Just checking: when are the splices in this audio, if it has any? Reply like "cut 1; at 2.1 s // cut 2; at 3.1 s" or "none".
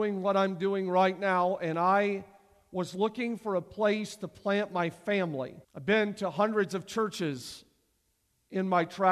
cut 1; at 5.6 s